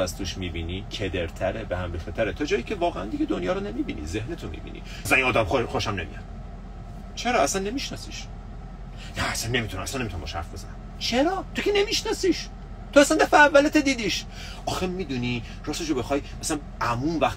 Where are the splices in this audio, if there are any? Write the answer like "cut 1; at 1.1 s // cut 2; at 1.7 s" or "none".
cut 1; at 5.0 s